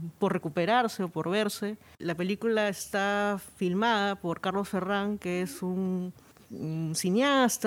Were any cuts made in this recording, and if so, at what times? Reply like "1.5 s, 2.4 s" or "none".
2.0 s